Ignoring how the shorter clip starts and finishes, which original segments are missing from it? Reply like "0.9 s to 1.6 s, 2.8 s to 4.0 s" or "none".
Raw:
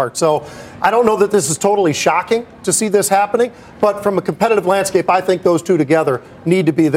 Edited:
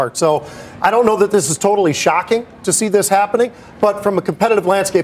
none